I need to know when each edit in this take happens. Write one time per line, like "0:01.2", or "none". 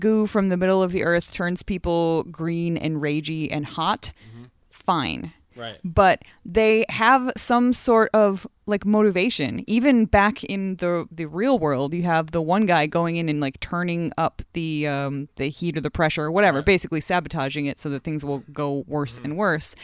none